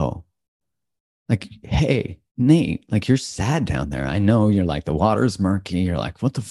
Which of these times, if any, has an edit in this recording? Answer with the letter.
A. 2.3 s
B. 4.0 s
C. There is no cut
A